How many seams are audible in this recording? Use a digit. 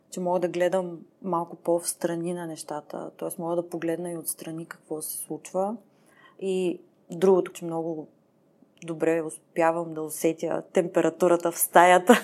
1